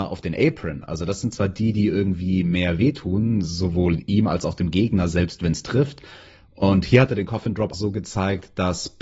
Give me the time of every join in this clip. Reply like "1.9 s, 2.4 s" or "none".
7.7 s